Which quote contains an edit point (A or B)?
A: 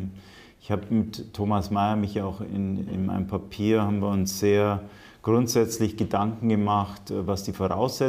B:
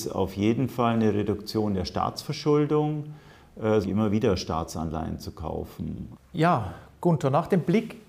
B